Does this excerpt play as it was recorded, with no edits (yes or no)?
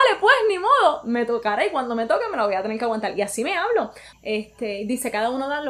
no